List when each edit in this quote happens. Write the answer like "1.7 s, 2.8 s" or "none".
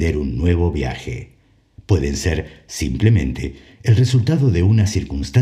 1.7 s